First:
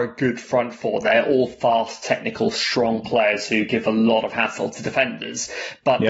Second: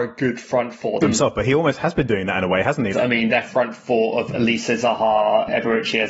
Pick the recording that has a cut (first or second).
second